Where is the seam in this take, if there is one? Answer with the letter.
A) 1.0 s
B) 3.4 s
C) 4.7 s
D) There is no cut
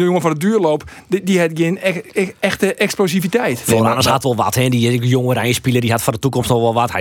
D